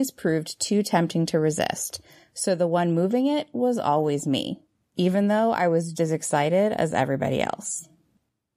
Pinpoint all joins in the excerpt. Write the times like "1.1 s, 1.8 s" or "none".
4.8 s, 5.9 s